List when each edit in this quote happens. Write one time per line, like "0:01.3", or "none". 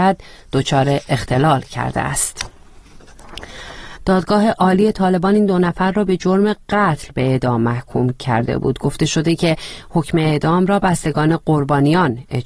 0:04.0